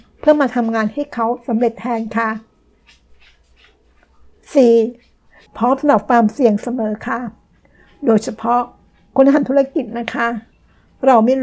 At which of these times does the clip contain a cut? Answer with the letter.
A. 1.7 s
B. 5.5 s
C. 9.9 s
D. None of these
B